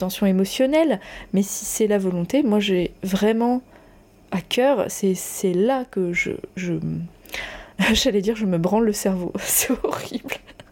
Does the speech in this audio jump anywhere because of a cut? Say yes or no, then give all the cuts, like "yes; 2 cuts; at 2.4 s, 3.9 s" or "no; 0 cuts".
no; 0 cuts